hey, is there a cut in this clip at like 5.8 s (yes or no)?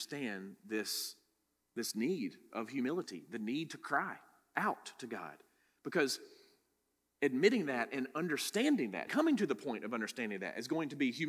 no